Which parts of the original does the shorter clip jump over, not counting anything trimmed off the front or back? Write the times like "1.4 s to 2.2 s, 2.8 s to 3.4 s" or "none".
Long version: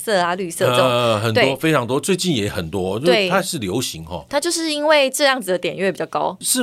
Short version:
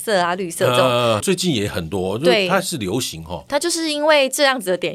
1.2 s to 2.0 s